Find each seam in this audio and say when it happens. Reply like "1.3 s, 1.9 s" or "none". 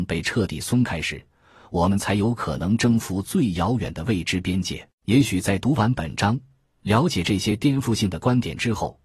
4.9 s